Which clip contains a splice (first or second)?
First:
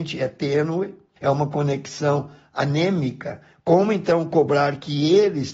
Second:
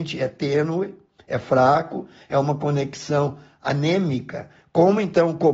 first